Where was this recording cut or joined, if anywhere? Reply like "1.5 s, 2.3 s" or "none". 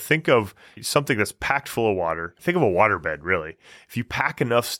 2.4 s